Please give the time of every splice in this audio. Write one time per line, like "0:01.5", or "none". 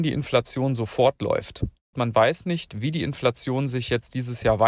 0:01.9